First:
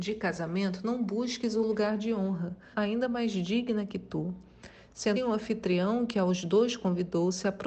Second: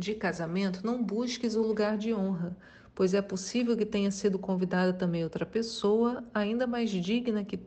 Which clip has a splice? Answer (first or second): first